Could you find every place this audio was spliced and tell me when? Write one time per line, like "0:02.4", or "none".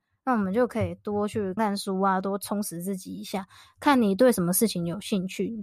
0:01.6